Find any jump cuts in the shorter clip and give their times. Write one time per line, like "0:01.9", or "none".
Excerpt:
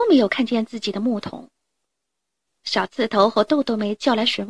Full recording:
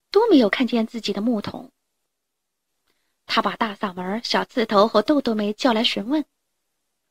0:02.6